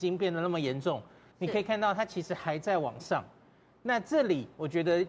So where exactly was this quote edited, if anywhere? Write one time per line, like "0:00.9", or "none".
0:01.3